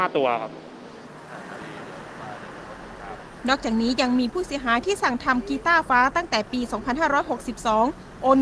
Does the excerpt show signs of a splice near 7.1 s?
no; 1 cut; at 5.9 s

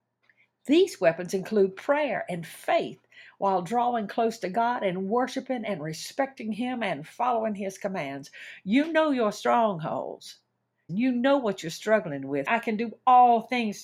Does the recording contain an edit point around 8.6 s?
no; 2 cuts; at 10.9 s, 12.5 s

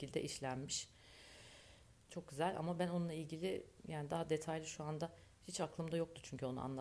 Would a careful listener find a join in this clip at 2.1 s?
yes; 1 cut; at 2.1 s

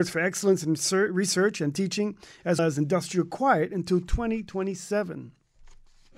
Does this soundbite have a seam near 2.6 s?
yes; 1 cut; at 2.6 s

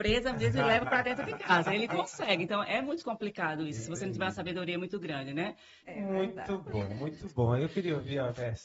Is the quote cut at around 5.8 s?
yes; 1 cut; at 5.8 s

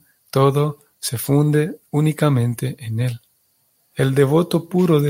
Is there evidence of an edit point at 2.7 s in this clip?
no; 1 cut; at 3.9 s

